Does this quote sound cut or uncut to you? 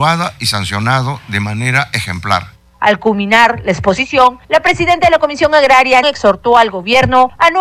cut